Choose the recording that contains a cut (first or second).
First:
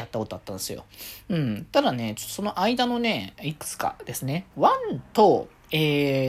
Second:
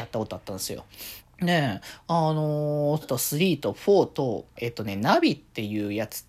second